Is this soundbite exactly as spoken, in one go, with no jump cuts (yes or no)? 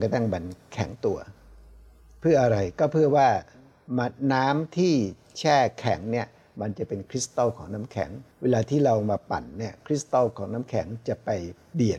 no